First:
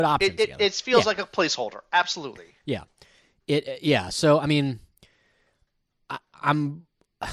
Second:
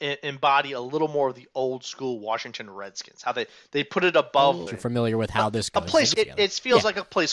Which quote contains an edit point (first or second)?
second